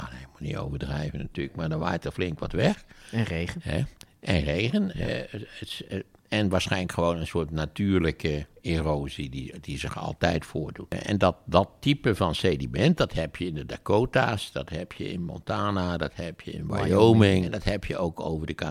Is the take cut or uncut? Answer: uncut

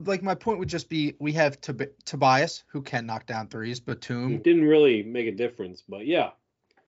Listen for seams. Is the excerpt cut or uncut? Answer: cut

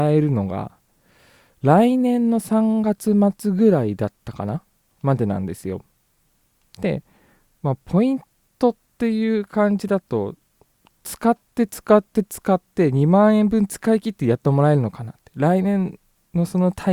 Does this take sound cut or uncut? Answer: uncut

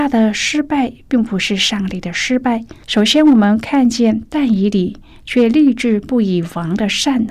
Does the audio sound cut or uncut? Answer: cut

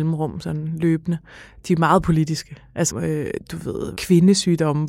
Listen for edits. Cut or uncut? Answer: cut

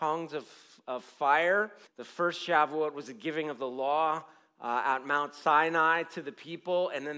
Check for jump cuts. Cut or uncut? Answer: cut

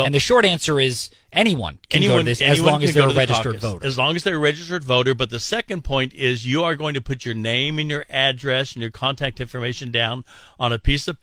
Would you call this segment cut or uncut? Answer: uncut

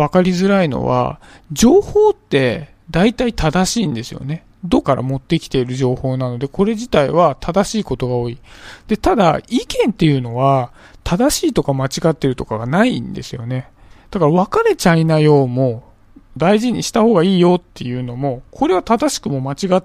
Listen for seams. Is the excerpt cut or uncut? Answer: cut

